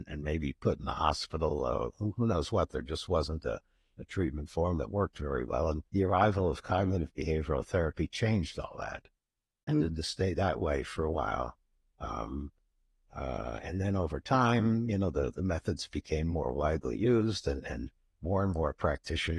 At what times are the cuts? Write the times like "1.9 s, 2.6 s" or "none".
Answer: 5.9 s, 9.7 s